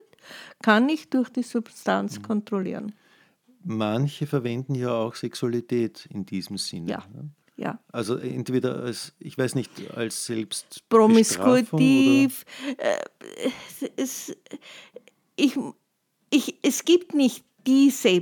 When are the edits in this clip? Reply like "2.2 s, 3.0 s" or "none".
7.4 s